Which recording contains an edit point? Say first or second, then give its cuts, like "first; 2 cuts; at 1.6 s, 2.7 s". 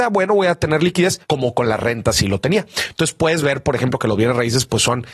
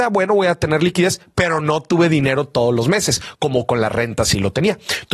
first; 1 cut; at 1.2 s